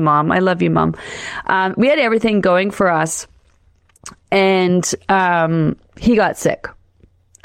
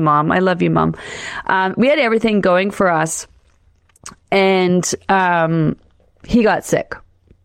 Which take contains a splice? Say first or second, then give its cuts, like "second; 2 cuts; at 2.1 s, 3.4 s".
first; 1 cut; at 5.8 s